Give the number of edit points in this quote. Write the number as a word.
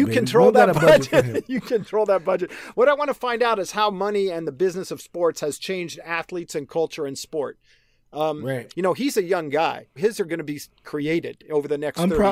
two